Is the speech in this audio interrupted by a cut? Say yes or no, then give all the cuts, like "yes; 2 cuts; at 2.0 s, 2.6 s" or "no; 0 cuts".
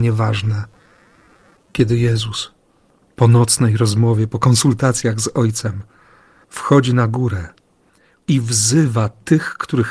no; 0 cuts